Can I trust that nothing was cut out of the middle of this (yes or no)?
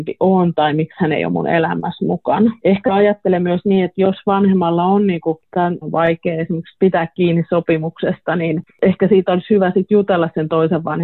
no